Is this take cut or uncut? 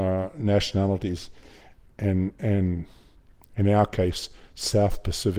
uncut